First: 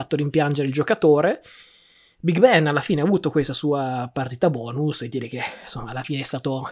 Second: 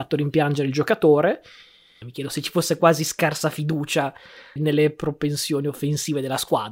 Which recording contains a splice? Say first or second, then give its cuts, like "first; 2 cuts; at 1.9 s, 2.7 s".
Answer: second; 2 cuts; at 2.0 s, 4.6 s